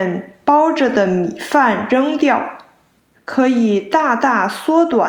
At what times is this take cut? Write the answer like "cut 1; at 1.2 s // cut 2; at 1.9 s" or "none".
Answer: cut 1; at 3.1 s